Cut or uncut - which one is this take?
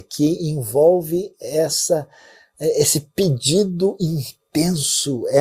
uncut